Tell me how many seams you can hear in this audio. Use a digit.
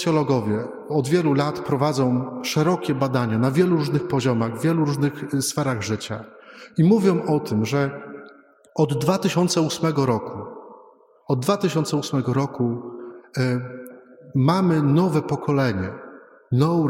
0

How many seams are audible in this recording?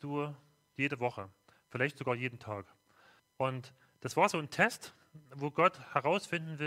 1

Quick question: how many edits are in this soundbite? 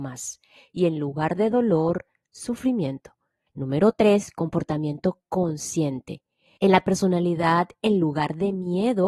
2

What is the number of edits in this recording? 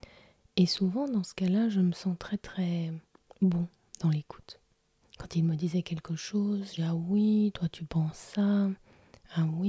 2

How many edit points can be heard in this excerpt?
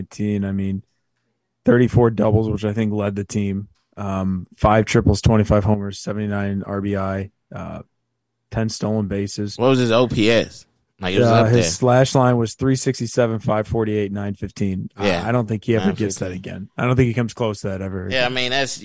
0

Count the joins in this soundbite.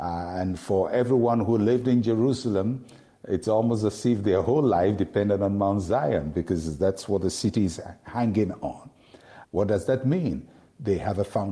1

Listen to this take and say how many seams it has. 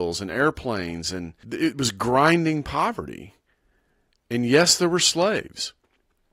1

